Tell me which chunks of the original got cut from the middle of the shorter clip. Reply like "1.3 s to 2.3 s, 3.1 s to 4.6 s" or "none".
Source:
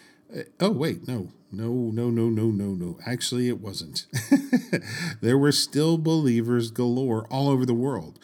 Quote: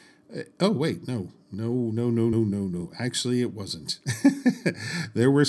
2.3 s to 2.4 s